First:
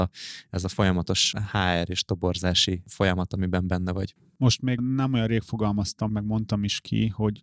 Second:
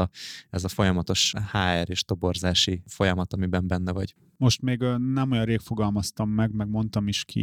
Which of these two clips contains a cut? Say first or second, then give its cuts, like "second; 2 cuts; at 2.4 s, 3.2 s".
first; 2 cuts; at 4.8 s, 6.1 s